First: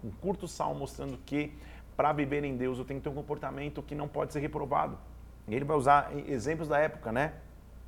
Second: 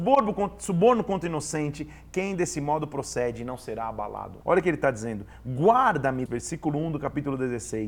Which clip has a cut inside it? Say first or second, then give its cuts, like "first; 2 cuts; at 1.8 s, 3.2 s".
second; 2 cuts; at 4.4 s, 6.3 s